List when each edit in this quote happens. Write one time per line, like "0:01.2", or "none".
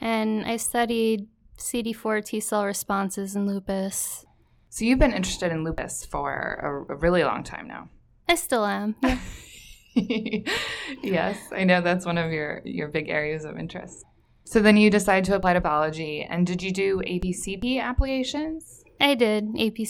none

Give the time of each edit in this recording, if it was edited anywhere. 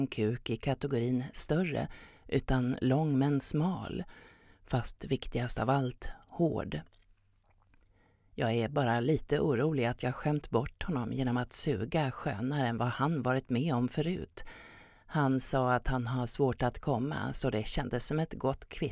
none

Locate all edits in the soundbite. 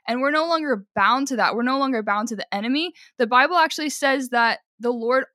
none

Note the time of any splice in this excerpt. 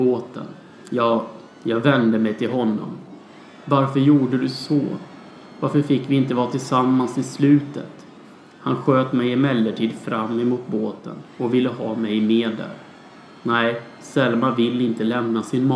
none

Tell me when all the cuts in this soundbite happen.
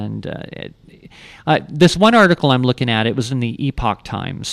none

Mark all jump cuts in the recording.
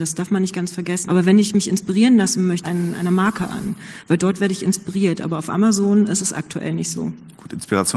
0:01.0
0:02.6

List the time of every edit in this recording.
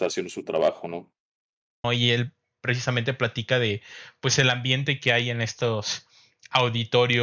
0:01.8

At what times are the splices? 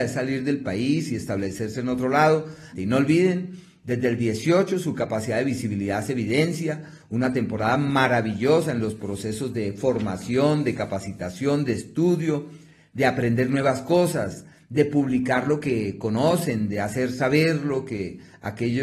0:02.7

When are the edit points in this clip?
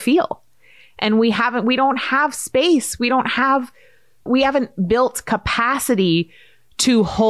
none

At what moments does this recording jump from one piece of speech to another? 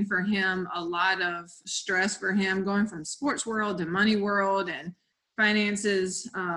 0:01.6

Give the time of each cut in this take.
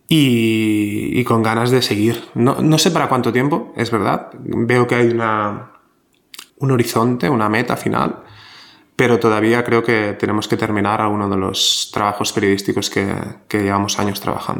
0:06.5

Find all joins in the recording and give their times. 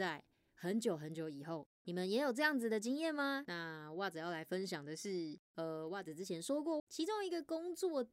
0:01.9
0:03.5
0:06.8

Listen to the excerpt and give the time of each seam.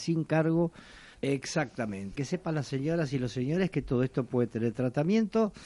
0:01.1
0:02.1

